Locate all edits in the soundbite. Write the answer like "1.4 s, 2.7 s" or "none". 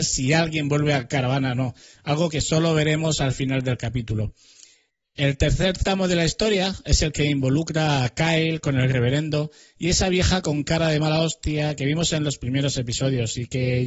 none